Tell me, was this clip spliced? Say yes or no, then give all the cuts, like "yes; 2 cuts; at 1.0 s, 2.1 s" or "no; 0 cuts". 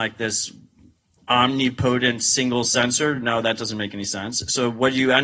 no; 0 cuts